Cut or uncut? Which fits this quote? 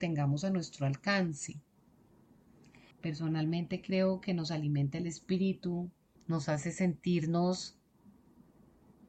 cut